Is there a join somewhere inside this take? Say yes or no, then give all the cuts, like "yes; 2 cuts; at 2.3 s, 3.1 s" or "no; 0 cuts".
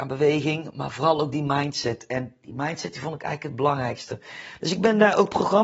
no; 0 cuts